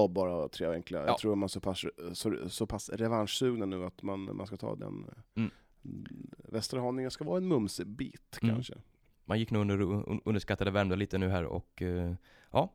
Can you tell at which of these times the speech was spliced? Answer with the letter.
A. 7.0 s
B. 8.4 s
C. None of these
C